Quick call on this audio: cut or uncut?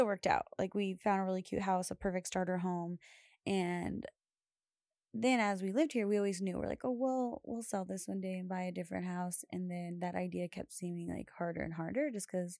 uncut